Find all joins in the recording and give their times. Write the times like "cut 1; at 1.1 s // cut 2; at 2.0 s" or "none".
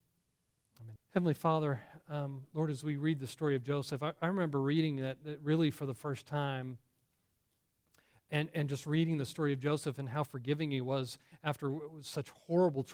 cut 1; at 1.0 s